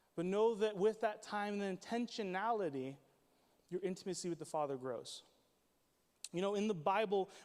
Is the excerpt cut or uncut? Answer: uncut